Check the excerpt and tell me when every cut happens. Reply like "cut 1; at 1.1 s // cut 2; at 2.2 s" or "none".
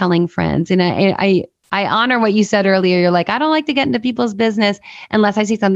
none